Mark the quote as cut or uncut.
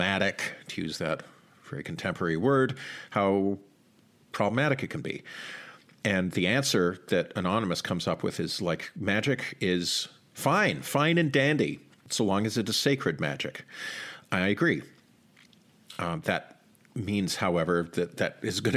uncut